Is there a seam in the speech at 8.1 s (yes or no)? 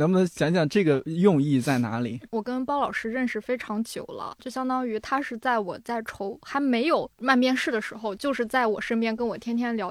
yes